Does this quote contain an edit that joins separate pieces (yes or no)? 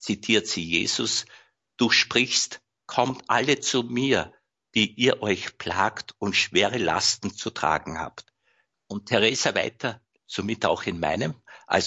yes